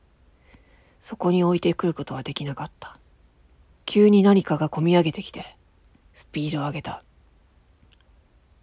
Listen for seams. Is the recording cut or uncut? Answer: cut